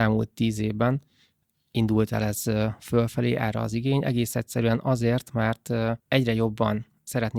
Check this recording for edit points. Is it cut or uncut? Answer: cut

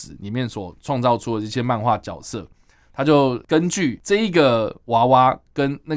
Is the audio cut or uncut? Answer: uncut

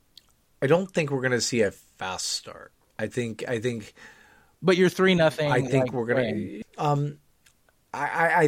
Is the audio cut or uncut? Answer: cut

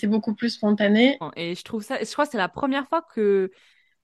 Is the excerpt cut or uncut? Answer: cut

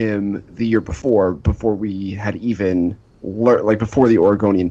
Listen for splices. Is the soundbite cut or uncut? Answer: uncut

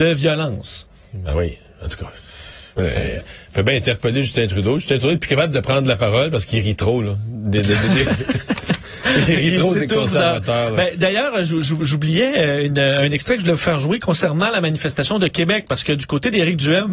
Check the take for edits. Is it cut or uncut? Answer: uncut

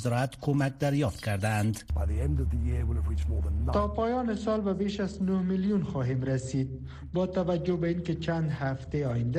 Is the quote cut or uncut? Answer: uncut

